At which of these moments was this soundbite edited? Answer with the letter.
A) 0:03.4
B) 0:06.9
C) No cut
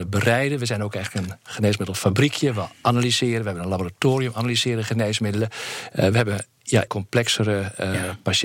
B